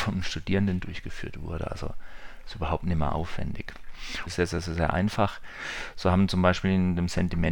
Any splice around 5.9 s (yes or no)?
no